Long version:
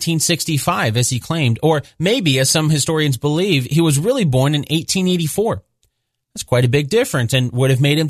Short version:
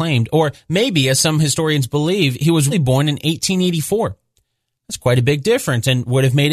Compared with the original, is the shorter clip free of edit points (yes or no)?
no